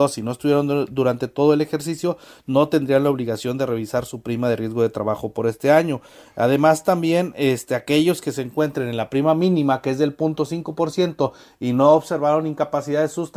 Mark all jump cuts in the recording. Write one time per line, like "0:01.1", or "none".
none